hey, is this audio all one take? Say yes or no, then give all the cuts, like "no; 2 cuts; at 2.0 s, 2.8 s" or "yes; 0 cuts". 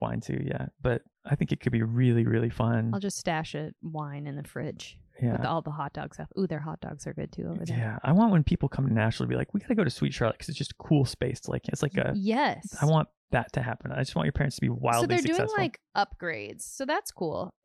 yes; 0 cuts